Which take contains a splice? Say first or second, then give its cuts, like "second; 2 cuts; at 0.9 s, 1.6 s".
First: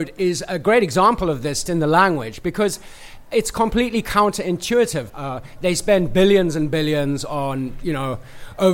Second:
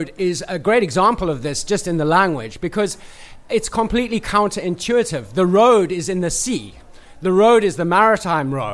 first; 2 cuts; at 1.7 s, 5.1 s